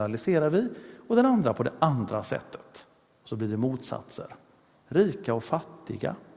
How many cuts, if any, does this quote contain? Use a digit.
1